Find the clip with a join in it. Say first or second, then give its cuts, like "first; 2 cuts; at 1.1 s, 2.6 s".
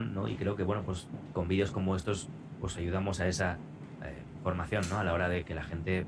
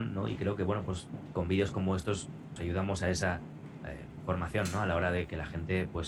second; 1 cut; at 2.6 s